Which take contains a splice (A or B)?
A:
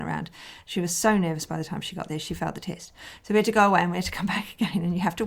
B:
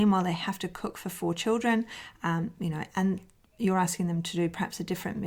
B